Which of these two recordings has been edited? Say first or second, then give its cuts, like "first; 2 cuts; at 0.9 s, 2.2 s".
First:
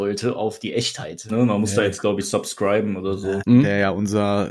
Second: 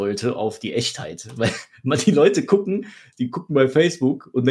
first; 2 cuts; at 1.3 s, 3.4 s